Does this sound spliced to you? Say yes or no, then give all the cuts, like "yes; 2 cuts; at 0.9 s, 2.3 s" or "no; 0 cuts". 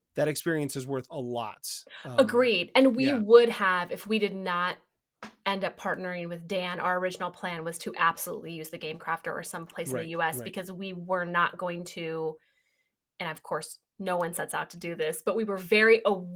no; 0 cuts